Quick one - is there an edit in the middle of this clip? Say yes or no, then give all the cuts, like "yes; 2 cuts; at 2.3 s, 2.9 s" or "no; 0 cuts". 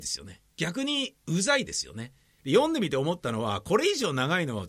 yes; 1 cut; at 2.4 s